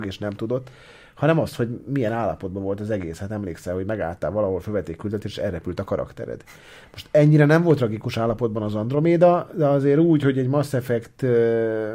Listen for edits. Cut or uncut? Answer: uncut